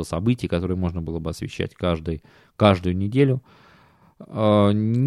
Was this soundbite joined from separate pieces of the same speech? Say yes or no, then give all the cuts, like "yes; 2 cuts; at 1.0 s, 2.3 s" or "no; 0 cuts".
no; 0 cuts